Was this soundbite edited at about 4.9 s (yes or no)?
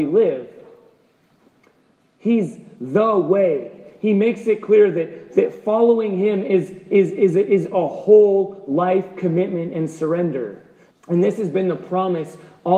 no